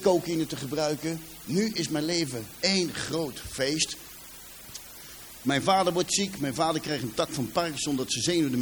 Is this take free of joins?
yes; 0 cuts

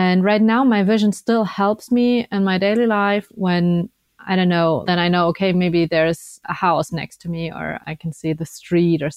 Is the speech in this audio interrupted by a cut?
yes; 1 cut; at 4.8 s

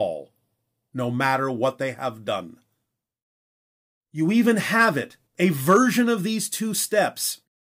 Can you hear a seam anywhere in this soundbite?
yes; 2 cuts; at 3.9 s, 5.3 s

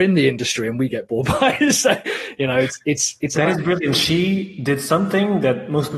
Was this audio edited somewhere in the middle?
no; 0 cuts

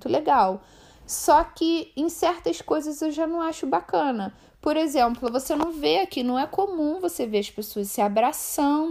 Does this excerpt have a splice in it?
no; 0 cuts

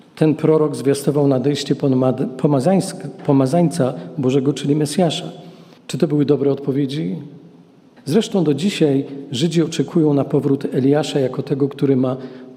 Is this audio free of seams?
no; 2 cuts; at 5.8 s, 8.0 s

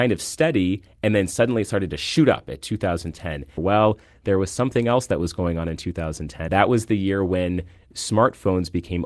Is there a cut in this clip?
yes; 2 cuts; at 3.6 s, 6.5 s

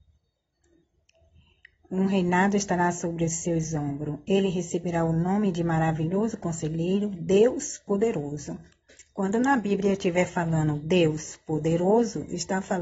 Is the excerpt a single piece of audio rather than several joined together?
yes; 0 cuts

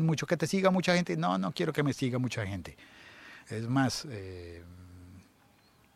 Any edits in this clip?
yes; 1 cut; at 3.4 s

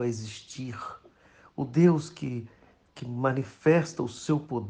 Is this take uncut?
yes; 0 cuts

